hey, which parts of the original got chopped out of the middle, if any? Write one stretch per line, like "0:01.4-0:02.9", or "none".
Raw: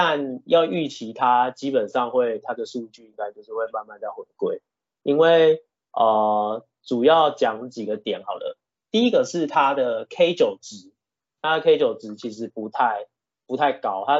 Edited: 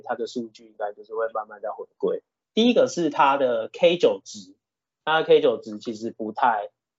0:04.8-0:08.8